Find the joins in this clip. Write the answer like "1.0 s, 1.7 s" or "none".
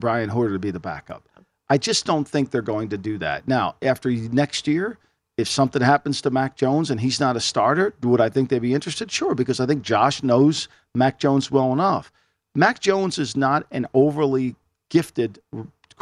none